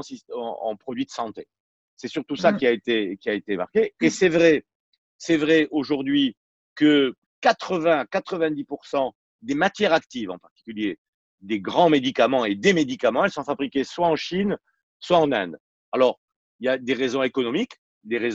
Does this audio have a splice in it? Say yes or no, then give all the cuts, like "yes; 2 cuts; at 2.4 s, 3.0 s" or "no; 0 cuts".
no; 0 cuts